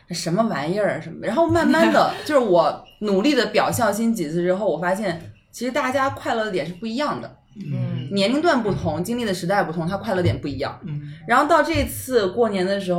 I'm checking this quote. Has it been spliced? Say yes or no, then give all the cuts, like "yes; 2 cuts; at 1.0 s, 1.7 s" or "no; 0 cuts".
no; 0 cuts